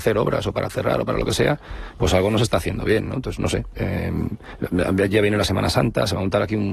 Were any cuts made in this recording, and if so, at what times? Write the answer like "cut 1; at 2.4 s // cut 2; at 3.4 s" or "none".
none